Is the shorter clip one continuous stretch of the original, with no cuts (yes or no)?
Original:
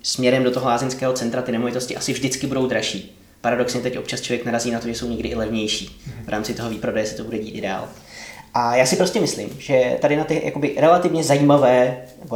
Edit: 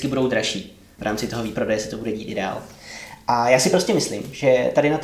no